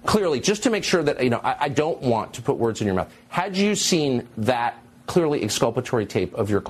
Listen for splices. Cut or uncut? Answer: uncut